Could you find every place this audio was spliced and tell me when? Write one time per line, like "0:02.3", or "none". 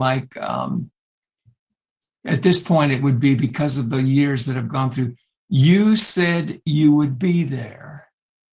none